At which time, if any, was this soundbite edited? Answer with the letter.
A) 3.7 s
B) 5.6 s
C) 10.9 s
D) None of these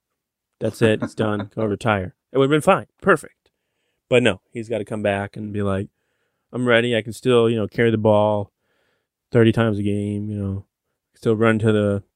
D